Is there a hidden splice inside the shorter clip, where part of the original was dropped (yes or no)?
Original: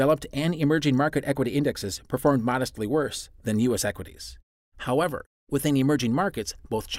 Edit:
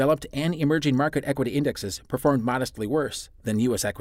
no